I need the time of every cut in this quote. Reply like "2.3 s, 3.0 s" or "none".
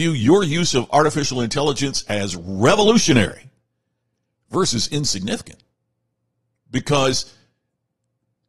none